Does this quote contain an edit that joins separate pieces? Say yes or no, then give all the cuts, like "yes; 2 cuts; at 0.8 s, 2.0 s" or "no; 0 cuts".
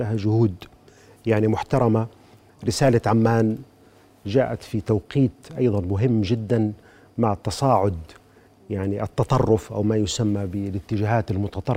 no; 0 cuts